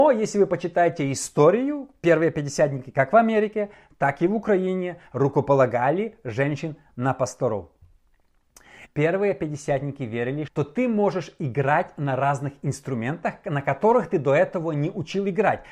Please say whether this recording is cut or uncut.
cut